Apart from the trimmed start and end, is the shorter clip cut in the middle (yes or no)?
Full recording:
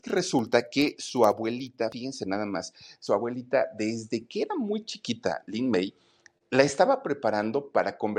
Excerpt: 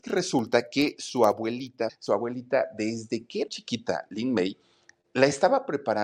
yes